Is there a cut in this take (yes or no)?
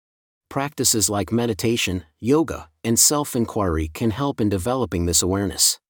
no